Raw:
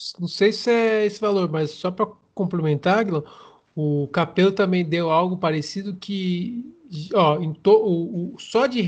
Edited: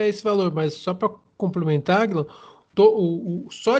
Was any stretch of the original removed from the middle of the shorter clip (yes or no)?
yes